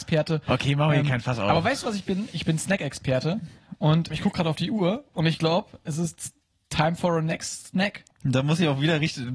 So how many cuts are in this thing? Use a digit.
2